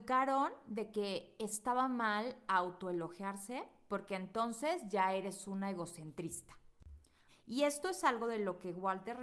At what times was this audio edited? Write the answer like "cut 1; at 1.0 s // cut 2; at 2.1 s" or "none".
cut 1; at 7.3 s